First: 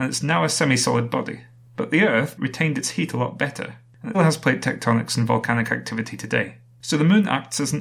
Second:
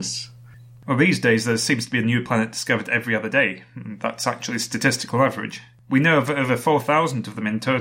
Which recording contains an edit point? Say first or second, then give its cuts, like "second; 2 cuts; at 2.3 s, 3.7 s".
first; 2 cuts; at 2.4 s, 4.1 s